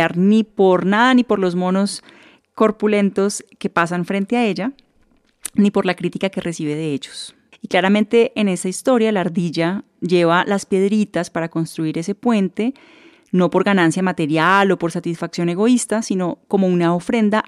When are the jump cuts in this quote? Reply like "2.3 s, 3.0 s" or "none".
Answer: 7.5 s